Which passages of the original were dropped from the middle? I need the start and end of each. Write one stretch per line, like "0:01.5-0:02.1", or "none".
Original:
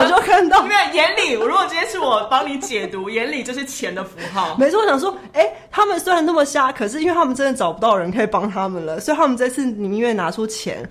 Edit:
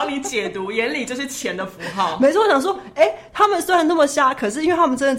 none